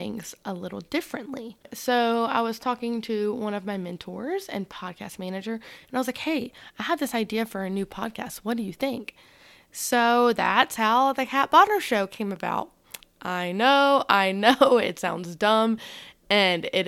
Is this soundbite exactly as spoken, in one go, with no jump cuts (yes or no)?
yes